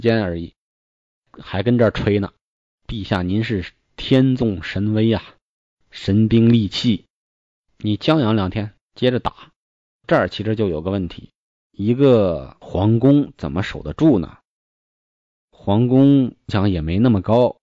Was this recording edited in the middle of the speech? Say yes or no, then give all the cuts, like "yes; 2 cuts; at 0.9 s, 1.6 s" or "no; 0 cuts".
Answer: yes; 1 cut; at 11.6 s